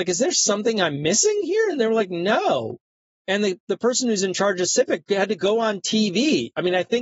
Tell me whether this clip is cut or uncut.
uncut